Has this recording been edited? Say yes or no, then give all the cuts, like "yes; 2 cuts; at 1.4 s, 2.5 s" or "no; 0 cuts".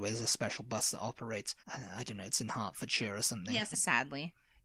yes; 2 cuts; at 1.6 s, 3.7 s